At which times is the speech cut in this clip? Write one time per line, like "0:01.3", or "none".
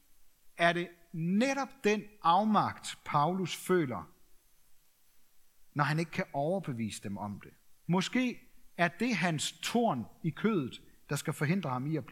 0:05.7
0:07.9